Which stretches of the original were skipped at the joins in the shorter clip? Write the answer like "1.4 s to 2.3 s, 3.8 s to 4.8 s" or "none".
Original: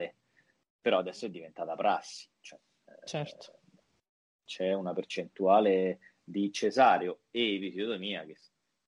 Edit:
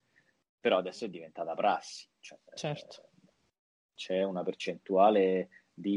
2.7 s to 3.0 s